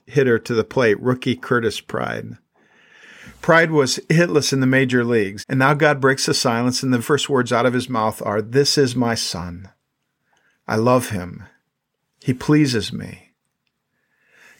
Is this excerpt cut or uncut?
cut